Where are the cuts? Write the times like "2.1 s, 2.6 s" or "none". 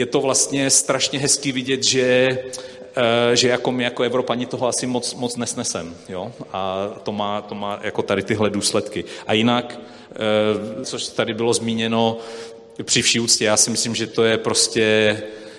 10.8 s